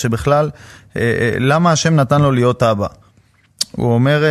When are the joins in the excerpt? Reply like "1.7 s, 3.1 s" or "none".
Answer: 1.0 s